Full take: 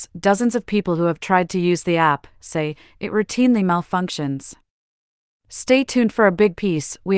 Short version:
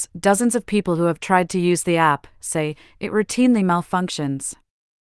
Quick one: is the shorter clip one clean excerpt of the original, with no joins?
yes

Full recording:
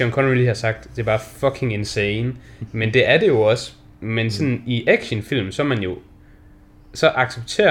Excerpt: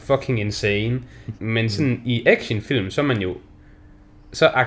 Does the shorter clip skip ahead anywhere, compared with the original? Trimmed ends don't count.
yes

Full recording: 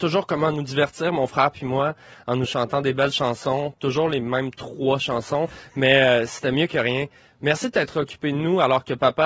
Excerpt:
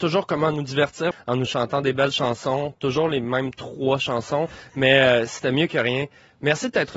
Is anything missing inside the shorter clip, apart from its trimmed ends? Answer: yes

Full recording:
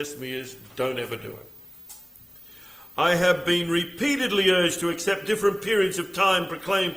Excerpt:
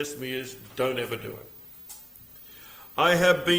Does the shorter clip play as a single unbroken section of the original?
yes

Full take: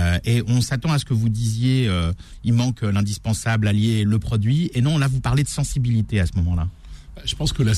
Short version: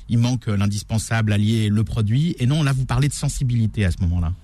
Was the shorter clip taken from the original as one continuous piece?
yes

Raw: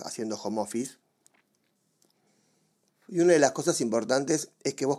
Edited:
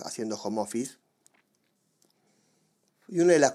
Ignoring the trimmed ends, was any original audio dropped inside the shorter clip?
no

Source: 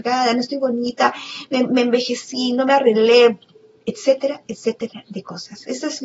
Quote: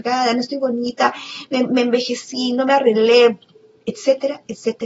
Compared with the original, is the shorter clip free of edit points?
yes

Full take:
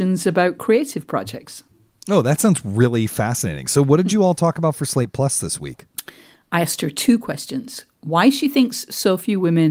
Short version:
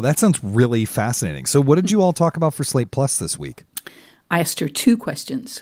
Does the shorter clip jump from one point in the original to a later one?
no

